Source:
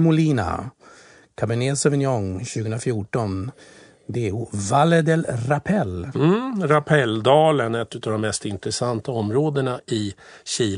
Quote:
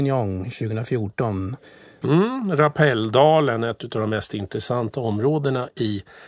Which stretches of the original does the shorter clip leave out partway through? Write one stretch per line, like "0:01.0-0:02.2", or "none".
0:04.0-0:06.1